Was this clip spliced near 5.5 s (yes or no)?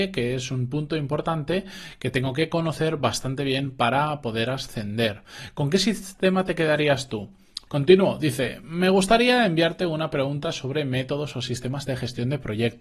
no